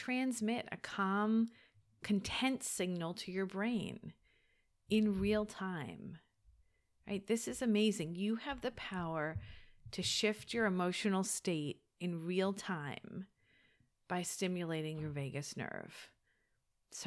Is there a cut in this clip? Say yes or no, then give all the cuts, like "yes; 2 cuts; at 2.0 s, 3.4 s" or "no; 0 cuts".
no; 0 cuts